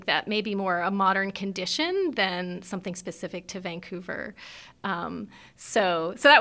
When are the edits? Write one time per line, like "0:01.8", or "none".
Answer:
none